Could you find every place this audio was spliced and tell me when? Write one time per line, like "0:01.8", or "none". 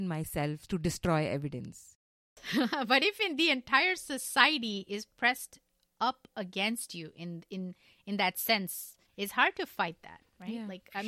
0:01.9
0:09.1